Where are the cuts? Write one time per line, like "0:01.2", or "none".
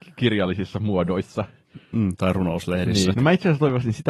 0:03.1